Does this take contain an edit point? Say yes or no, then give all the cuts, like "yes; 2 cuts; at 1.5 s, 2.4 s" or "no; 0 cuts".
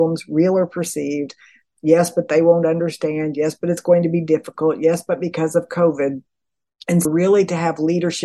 yes; 1 cut; at 7.1 s